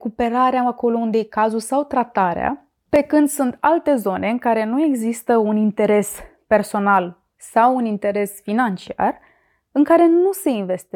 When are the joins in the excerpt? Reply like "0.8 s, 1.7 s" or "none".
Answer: 7.3 s